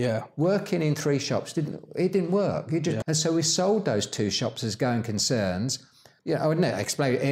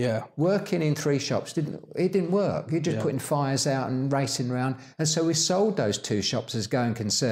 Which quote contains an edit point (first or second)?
first